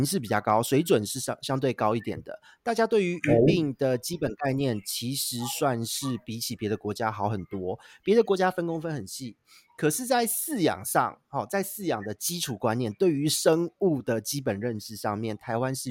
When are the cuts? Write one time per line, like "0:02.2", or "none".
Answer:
none